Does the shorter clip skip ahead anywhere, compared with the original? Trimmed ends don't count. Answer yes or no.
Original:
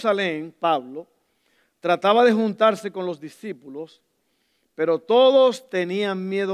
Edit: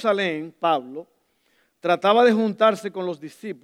no